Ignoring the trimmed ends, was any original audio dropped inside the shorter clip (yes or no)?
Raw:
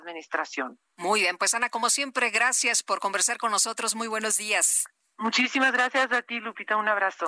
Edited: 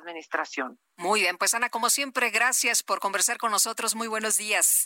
no